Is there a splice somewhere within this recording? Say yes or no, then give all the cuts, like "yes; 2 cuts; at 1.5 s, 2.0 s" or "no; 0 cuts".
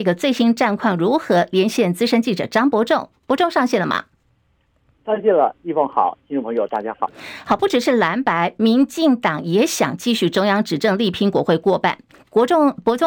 no; 0 cuts